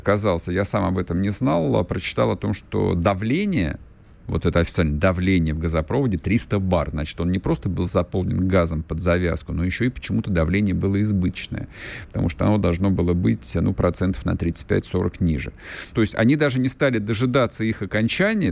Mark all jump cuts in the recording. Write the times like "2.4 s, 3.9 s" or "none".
15.9 s